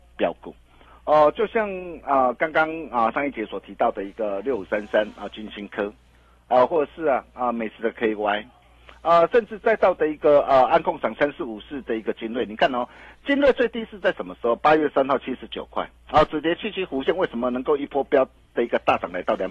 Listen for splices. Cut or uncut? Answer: uncut